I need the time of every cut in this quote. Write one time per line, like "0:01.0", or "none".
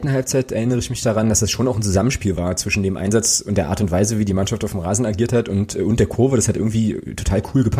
none